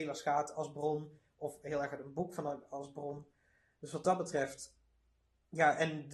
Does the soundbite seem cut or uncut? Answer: uncut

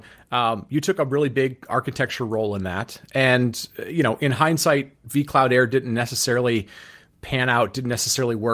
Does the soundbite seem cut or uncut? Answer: uncut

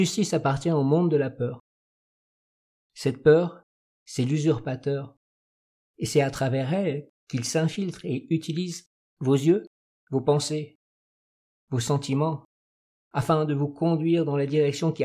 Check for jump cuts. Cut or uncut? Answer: cut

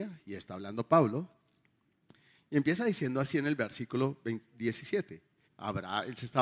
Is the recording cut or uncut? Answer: cut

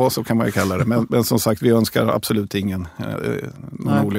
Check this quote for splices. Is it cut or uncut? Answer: uncut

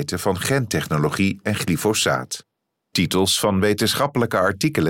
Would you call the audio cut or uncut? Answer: uncut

